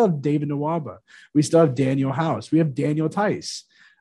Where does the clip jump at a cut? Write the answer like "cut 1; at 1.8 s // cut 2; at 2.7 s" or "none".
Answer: none